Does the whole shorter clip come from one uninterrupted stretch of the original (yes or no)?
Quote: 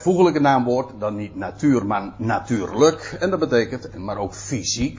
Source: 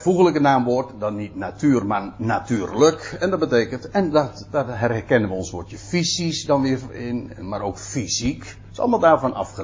no